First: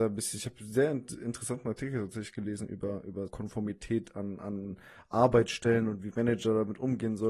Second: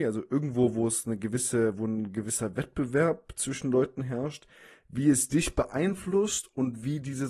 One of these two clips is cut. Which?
first; 1 cut; at 3.3 s

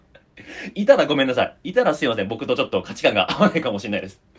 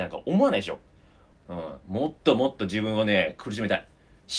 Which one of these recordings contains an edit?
second; 1 cut; at 1.3 s

